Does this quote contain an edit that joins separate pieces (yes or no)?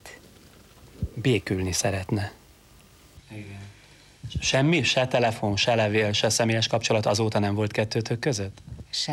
yes